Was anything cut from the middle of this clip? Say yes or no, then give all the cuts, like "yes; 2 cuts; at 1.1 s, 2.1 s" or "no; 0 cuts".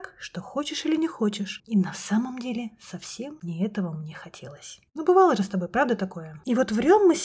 yes; 2 cuts; at 1.6 s, 4.9 s